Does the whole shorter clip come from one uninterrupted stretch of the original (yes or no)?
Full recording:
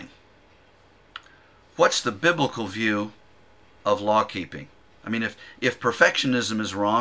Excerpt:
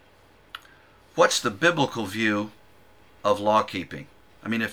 yes